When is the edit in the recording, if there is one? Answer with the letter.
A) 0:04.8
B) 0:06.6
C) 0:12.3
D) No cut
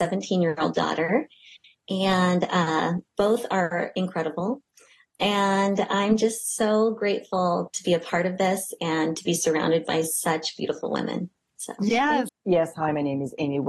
C